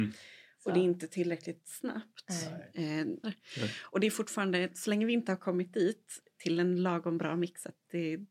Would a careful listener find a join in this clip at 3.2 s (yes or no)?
yes